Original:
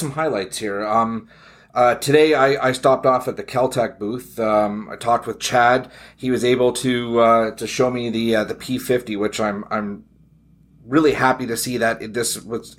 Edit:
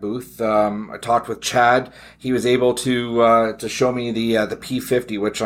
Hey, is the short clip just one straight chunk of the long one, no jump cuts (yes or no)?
yes